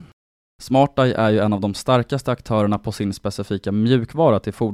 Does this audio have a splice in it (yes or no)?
no